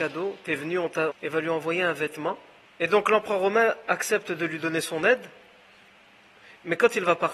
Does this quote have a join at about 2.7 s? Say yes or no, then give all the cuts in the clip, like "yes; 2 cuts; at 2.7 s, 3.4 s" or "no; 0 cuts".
yes; 2 cuts; at 1.1 s, 2.7 s